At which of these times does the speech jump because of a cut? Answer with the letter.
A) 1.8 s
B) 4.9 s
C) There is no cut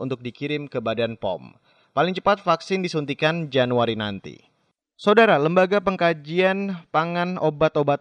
A